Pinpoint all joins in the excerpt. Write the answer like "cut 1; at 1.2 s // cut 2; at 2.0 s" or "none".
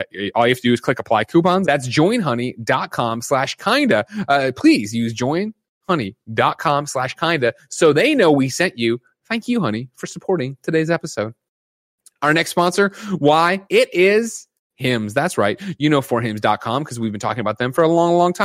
cut 1; at 1.6 s // cut 2; at 13.7 s